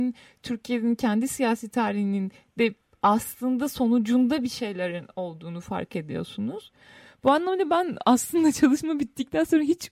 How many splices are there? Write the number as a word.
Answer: zero